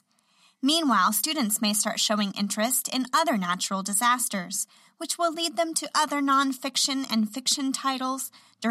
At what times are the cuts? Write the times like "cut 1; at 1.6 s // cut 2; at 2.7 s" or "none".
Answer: none